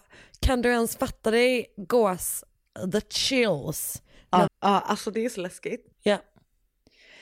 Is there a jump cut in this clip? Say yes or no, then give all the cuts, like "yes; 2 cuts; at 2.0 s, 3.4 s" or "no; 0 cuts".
yes; 2 cuts; at 4.5 s, 5.9 s